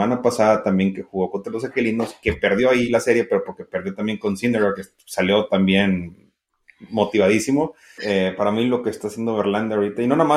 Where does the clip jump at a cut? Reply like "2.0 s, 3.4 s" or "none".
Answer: 8.0 s